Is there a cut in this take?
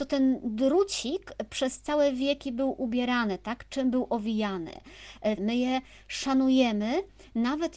yes; 1 cut; at 5.4 s

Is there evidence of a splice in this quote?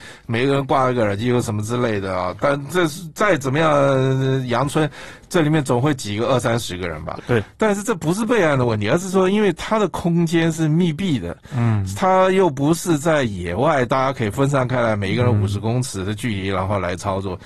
yes; 1 cut; at 7.2 s

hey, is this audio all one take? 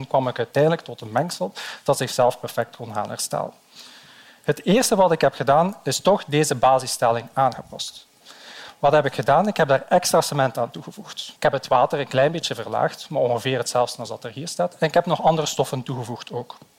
no; 1 cut; at 11.4 s

